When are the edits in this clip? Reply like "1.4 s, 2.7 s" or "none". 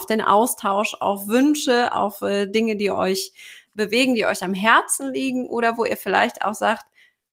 none